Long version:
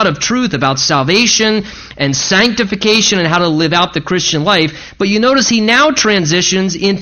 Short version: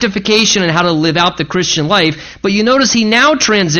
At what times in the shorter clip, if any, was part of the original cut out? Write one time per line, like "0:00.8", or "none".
none

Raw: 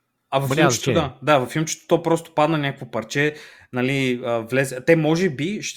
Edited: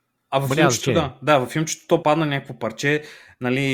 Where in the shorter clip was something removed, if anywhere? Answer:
0:02.0

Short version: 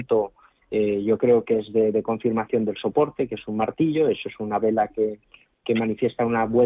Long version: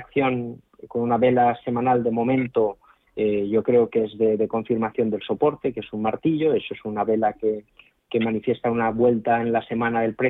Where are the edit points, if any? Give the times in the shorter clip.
none

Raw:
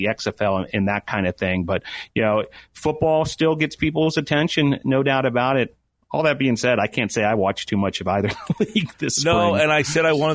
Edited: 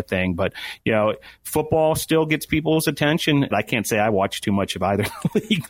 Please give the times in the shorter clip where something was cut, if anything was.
0:03.5

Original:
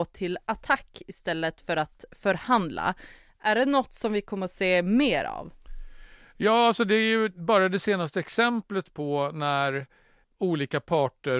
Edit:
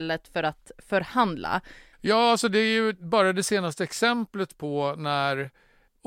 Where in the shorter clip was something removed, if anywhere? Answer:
0:01.9

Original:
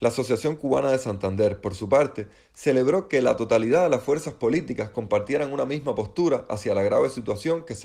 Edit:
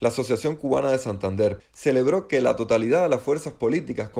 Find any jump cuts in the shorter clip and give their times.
0:01.6

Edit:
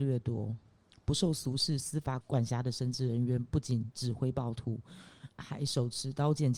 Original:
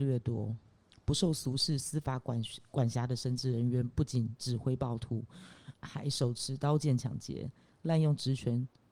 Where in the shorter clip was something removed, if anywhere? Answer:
0:02.2

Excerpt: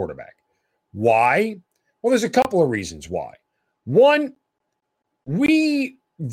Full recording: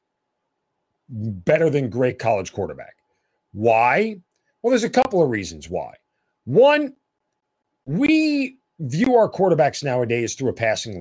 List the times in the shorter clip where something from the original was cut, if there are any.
none

